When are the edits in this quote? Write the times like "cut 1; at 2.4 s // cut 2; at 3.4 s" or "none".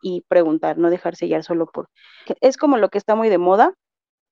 cut 1; at 2.2 s